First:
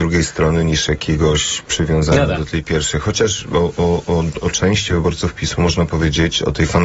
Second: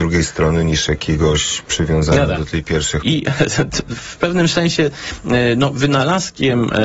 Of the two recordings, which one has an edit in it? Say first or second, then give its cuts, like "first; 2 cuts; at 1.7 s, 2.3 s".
second; 1 cut; at 3.0 s